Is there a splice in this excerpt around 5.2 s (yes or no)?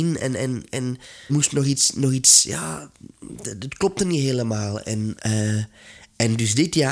yes